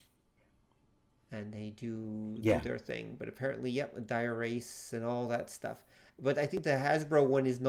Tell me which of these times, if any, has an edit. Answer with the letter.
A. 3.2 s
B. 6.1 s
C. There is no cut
C